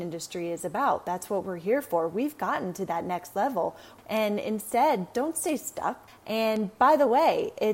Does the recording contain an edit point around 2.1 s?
no; 2 cuts; at 4.0 s, 6.1 s

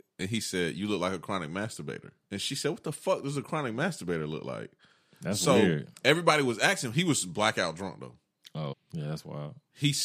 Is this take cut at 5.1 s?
yes; 3 cuts; at 2.2 s, 5.1 s, 8.7 s

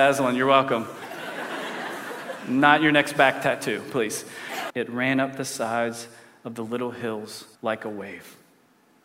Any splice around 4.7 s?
yes; 2 cuts; at 4.7 s, 7.5 s

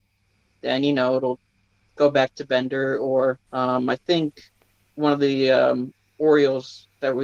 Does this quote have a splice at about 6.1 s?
no; 1 cut; at 3.5 s

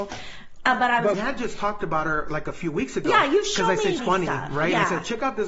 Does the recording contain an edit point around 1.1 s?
yes; 2 cuts; at 1.1 s, 4.0 s

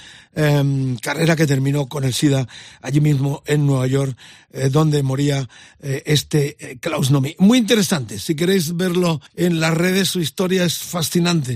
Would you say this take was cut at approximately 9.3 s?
yes; 1 cut; at 9.3 s

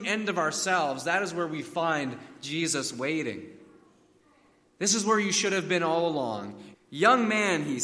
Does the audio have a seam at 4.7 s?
no; 1 cut; at 6.7 s

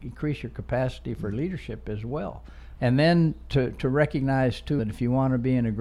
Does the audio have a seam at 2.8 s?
yes; 2 cuts; at 2.8 s, 4.8 s

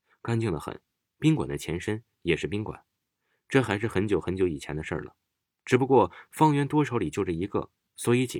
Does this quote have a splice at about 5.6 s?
no; 0 cuts

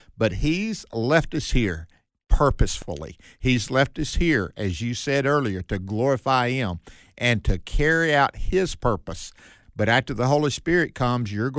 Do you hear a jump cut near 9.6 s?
yes; 1 cut; at 9.6 s

